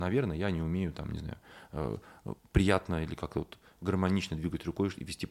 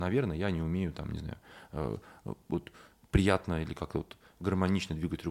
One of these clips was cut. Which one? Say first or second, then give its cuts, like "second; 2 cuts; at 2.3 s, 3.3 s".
first; 1 cut; at 2.4 s